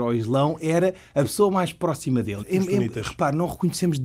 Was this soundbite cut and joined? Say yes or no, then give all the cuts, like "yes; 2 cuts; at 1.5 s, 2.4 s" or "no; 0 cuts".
yes; 1 cut; at 2.4 s